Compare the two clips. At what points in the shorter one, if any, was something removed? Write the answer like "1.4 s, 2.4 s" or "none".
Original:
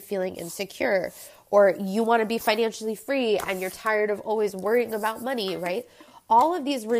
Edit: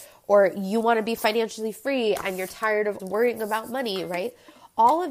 3.0 s

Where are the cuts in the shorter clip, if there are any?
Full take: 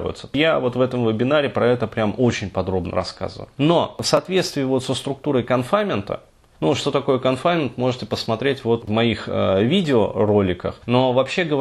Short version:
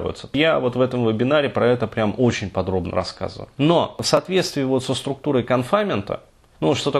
none

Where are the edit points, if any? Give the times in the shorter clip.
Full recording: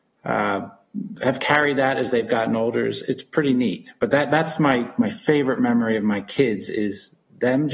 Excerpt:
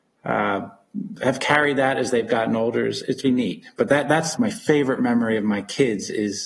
3.2 s, 4.3 s

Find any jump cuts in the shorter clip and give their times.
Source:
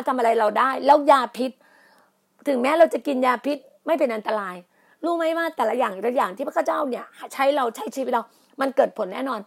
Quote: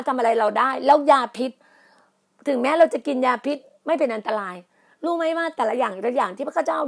none

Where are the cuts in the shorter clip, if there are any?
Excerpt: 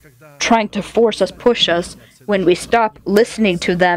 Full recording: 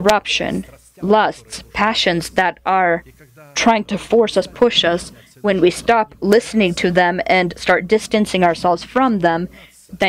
none

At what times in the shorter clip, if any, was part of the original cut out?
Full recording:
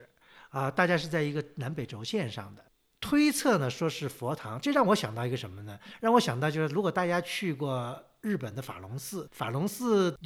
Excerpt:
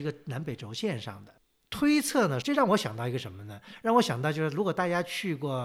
2.4 s

